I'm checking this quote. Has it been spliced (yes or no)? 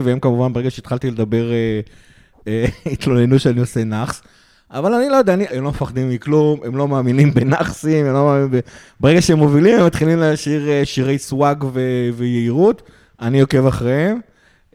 yes